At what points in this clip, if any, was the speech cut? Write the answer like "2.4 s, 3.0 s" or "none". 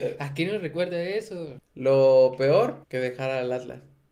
1.6 s, 2.8 s